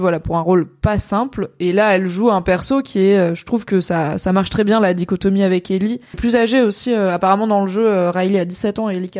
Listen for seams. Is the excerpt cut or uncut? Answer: cut